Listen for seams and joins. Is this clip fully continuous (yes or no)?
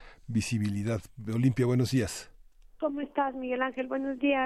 yes